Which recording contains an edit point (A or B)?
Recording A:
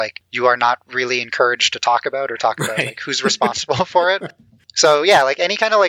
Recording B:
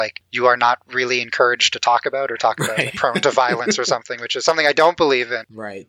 B